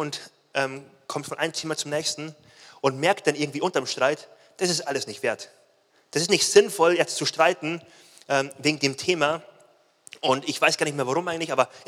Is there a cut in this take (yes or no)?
no